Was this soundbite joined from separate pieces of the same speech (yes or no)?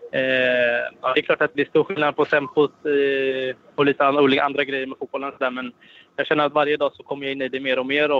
yes